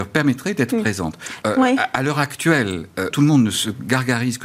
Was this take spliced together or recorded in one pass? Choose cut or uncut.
cut